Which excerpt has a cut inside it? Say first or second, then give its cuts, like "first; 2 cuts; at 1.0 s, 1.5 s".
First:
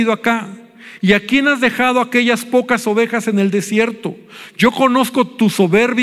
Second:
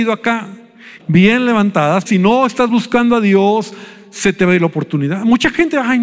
second; 2 cuts; at 1.0 s, 2.1 s